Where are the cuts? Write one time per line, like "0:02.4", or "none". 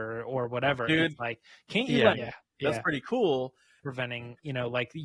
0:02.1
0:03.8